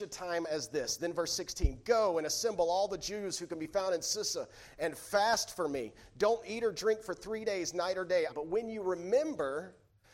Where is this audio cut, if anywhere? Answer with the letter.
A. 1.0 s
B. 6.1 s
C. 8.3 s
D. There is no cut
C